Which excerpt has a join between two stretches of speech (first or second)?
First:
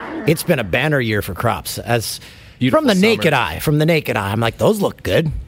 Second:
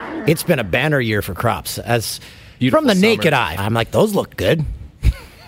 second